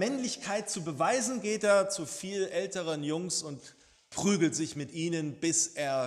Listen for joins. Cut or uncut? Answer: uncut